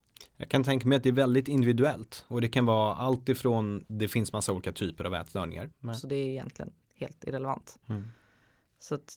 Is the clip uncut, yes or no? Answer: no